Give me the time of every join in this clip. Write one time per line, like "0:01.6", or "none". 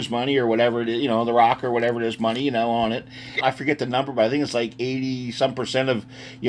0:03.4